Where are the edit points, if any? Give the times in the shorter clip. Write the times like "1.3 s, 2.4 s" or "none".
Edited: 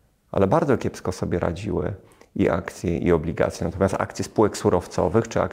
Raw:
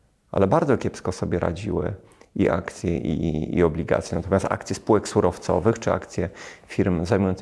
3.0 s